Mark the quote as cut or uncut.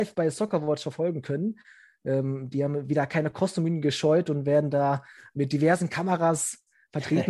uncut